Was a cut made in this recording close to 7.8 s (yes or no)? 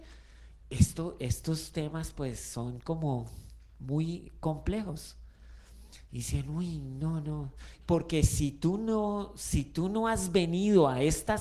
yes